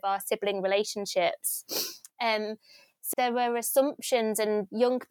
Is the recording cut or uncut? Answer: cut